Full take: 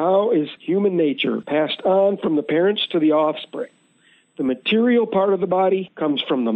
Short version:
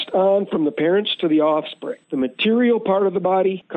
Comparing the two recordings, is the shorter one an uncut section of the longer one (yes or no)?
no